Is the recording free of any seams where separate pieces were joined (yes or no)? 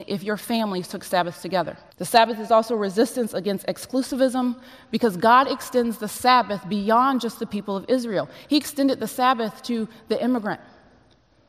no